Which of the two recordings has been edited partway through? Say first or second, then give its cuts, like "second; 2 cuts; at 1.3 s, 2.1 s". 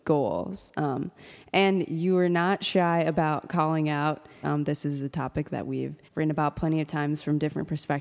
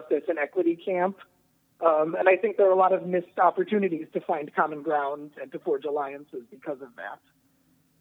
first; 2 cuts; at 4.4 s, 6.0 s